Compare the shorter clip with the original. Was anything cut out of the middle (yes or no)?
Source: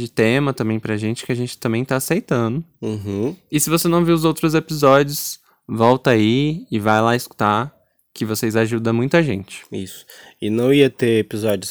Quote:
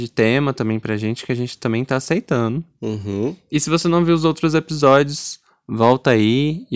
no